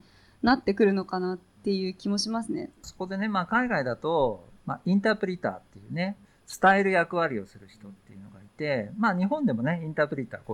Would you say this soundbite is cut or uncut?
uncut